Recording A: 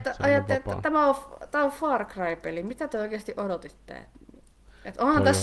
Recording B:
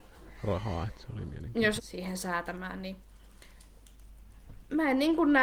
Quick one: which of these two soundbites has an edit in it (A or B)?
B